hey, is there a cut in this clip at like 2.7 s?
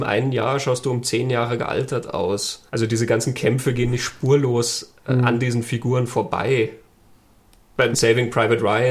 yes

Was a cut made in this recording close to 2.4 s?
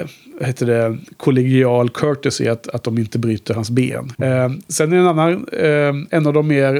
no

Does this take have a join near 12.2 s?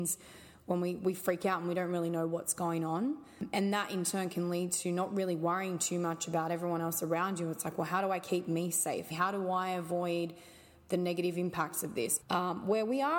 yes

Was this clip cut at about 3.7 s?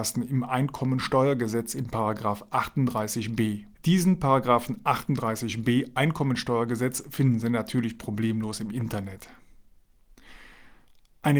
yes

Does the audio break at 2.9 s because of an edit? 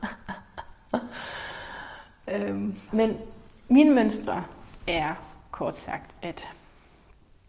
yes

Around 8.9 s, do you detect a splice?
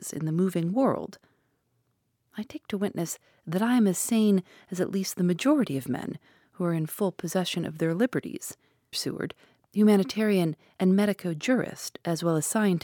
yes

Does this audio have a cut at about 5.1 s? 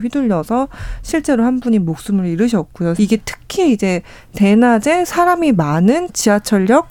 no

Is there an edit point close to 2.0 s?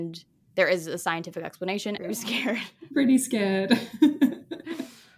yes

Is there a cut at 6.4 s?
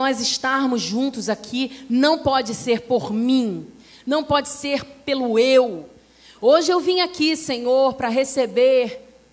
yes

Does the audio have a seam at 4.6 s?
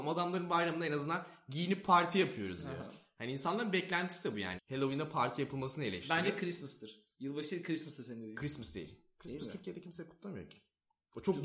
yes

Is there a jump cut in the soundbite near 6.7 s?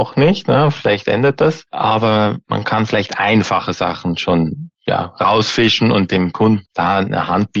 yes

